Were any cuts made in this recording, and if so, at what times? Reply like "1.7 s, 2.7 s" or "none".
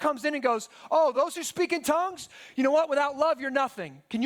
none

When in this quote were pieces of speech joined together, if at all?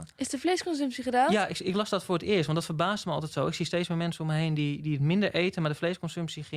none

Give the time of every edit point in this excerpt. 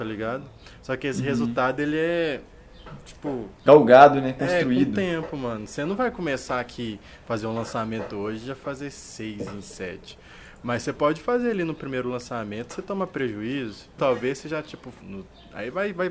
14.0 s, 15.0 s

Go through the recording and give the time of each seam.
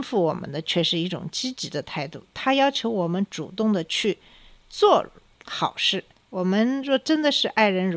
6.1 s

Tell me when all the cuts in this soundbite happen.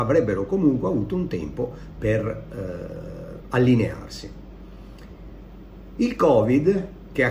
3.4 s

